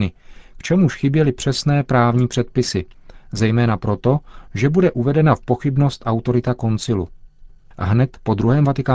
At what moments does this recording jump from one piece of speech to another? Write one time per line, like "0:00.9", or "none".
0:04.5